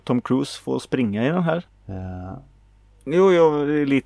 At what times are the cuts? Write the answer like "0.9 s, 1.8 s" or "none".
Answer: 1.7 s